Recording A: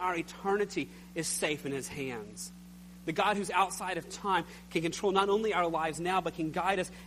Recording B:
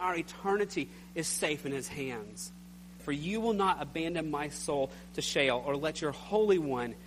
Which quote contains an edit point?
B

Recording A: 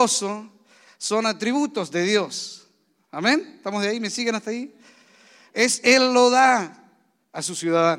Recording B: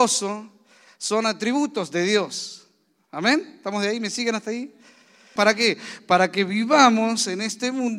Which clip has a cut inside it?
B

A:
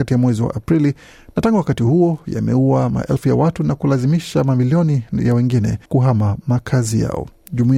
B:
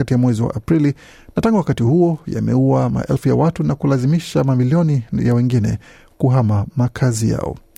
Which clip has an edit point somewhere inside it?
A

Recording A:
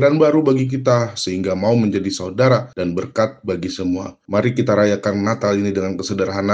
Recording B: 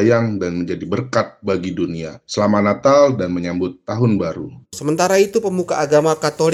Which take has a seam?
A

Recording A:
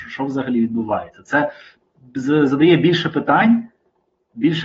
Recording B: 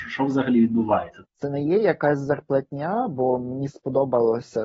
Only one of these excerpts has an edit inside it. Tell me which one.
B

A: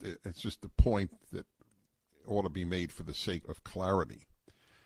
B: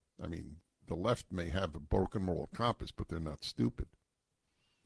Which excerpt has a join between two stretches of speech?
A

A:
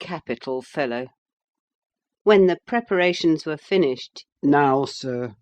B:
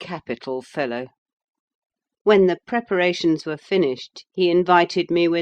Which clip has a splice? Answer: A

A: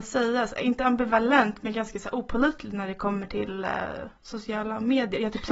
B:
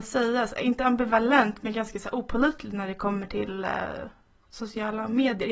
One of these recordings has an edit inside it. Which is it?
A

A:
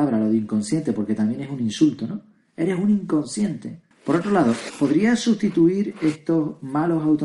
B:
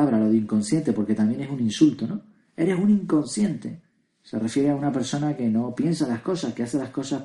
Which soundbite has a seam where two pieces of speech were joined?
A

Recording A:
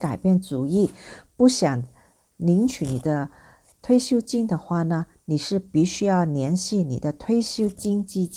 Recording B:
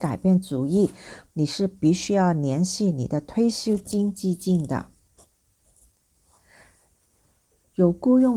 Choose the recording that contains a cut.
B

